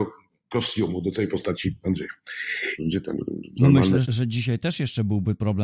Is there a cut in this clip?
yes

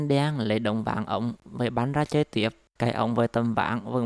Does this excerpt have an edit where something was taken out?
yes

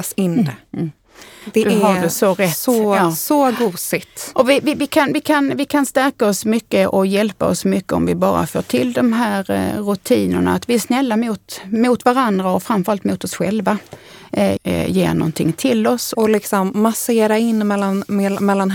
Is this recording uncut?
no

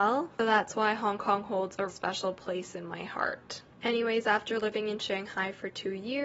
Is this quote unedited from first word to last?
no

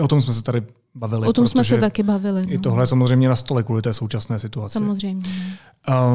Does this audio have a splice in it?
no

